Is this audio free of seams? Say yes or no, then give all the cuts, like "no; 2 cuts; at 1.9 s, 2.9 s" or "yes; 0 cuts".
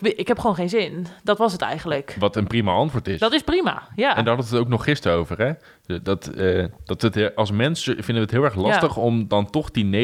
yes; 0 cuts